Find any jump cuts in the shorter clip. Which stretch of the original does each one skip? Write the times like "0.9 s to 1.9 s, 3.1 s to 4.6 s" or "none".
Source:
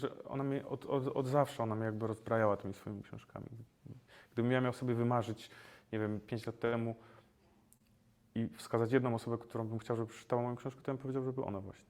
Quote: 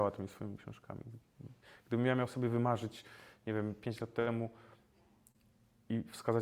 none